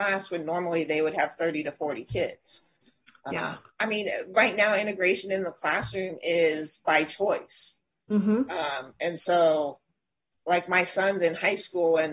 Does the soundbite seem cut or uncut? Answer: cut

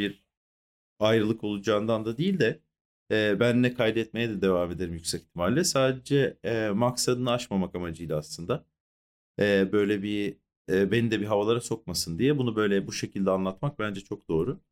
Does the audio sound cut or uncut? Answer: uncut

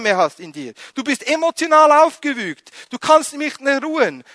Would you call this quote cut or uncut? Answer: uncut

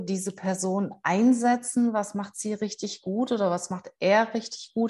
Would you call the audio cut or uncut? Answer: uncut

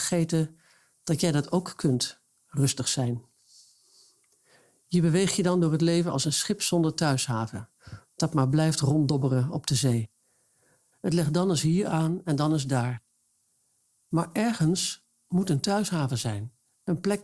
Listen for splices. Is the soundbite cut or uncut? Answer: uncut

